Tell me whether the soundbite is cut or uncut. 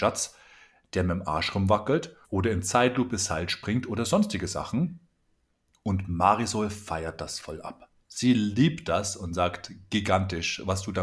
cut